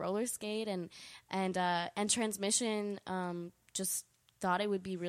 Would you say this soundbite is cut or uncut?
uncut